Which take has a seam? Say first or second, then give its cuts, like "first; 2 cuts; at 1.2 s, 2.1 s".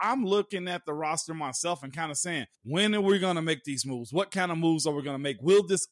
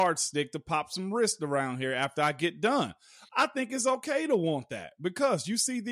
first; 1 cut; at 2.5 s